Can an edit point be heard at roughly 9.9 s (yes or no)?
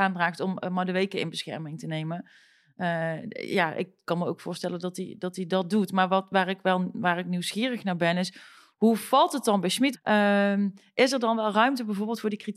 yes